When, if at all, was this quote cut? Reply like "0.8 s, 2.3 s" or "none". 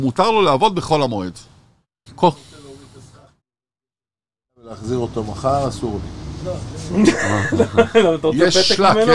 2.1 s